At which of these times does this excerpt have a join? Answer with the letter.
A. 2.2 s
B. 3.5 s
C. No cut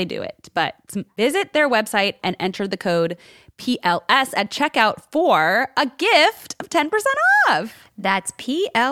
A